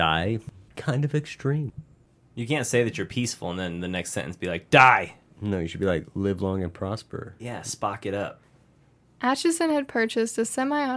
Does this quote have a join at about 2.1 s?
no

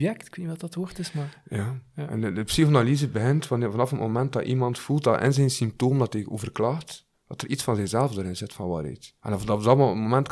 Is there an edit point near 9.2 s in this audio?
yes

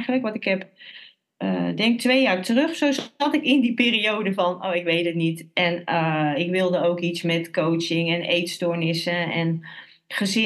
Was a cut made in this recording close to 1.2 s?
no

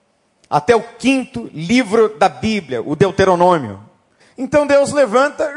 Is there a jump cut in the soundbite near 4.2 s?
yes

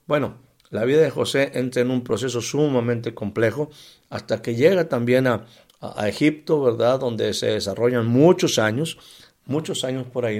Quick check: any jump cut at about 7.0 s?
no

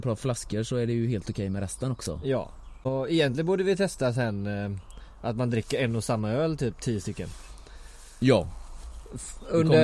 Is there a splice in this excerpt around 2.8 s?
no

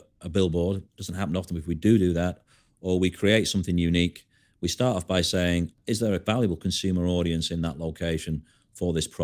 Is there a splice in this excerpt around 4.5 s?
no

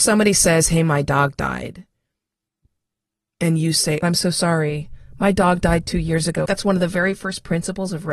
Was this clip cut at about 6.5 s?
yes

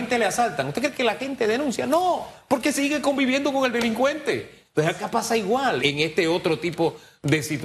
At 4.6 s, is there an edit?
yes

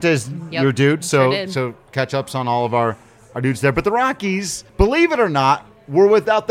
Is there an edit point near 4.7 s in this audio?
yes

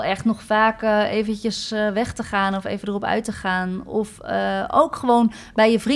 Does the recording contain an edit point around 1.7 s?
no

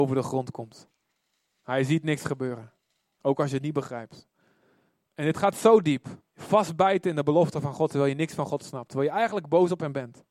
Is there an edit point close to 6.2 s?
yes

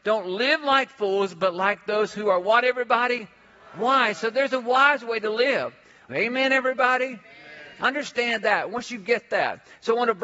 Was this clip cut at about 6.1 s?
yes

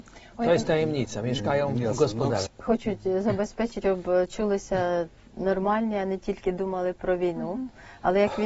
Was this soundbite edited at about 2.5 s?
yes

